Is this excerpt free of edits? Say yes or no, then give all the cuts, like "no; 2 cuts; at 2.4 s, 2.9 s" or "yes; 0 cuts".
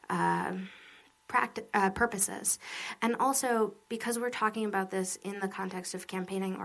yes; 0 cuts